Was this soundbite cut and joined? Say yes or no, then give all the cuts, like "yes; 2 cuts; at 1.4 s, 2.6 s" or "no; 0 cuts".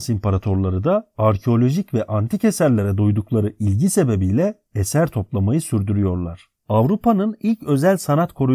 yes; 1 cut; at 6.6 s